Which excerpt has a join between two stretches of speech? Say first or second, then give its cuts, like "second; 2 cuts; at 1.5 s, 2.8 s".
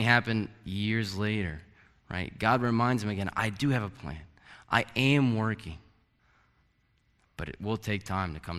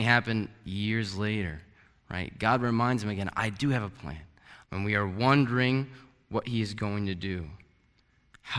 second; 1 cut; at 4.6 s